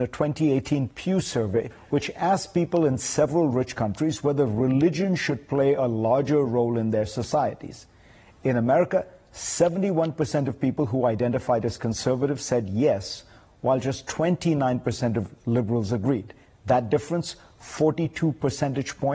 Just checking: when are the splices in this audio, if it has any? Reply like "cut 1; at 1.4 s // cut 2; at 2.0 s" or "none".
none